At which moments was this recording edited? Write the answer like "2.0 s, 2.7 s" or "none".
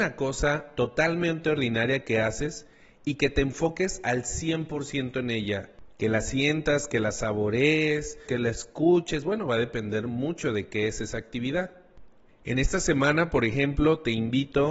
8.3 s, 12.3 s